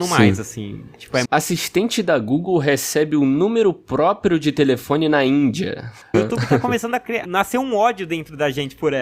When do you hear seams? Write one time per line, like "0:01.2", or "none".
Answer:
0:01.2
0:06.1
0:07.2

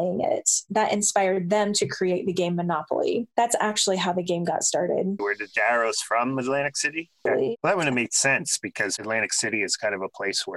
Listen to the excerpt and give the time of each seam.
0:05.2
0:07.3

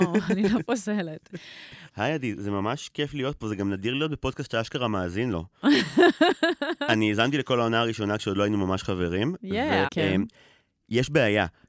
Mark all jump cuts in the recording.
0:01.9
0:09.9

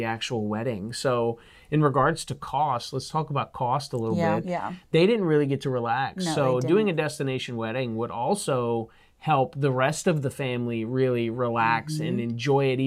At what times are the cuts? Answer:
0:04.4

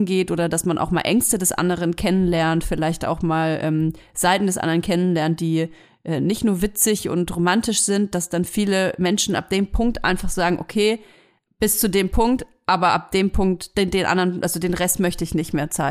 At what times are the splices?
none

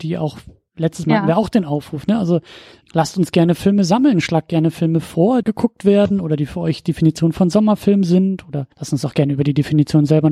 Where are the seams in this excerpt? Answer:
0:02.8
0:05.4
0:08.7

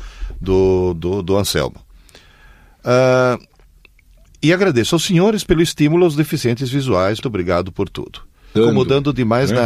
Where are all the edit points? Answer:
0:07.2
0:08.6

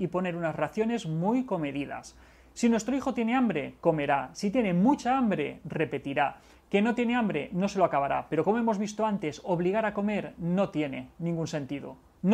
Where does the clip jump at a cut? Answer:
none

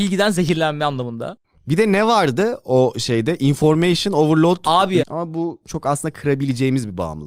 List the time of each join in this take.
0:05.0

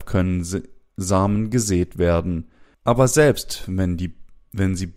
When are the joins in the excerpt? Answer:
0:02.7

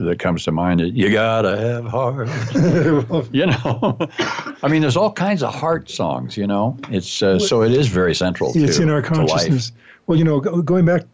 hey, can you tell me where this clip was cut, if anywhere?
none

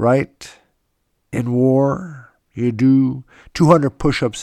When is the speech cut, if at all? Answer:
none

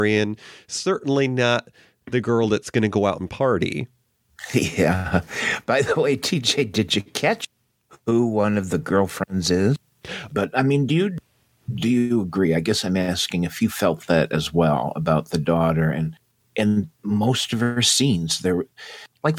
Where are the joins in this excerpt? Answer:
0:10.3

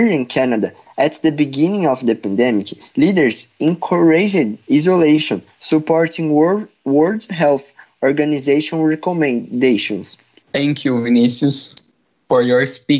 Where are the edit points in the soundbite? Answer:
0:10.4

